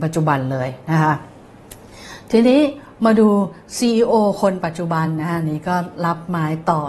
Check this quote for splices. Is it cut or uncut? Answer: uncut